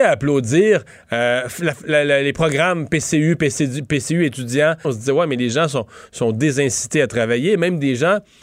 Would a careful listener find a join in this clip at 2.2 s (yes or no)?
no